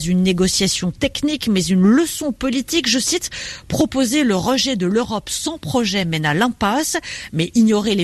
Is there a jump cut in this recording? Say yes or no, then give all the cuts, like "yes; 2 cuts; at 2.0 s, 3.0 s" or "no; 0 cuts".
no; 0 cuts